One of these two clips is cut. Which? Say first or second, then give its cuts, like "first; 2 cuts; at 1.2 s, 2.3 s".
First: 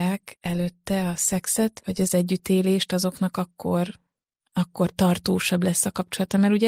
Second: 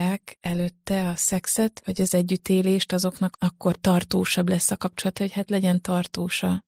second; 2 cuts; at 3.3 s, 5.2 s